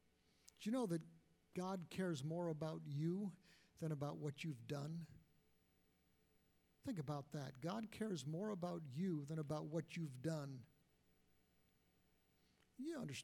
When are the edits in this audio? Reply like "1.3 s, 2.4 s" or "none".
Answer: none

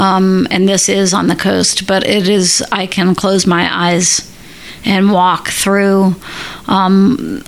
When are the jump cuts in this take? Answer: none

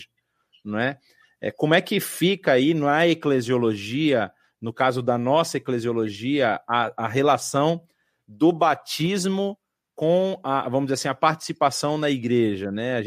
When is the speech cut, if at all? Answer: none

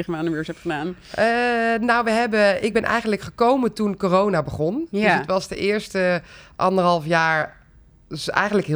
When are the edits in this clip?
none

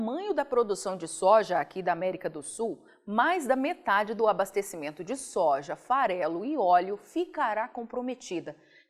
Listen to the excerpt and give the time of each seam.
none

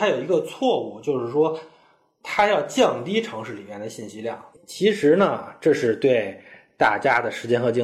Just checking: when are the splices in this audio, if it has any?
4.5 s

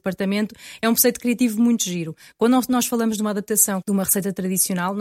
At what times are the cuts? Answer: 1.2 s, 3.8 s

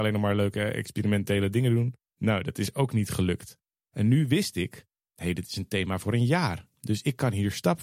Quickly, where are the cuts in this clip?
2.1 s

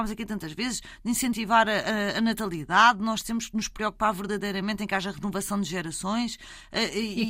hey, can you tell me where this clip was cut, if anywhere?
none

